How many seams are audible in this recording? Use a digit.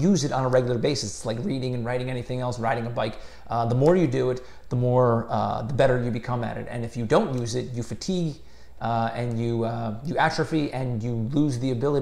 0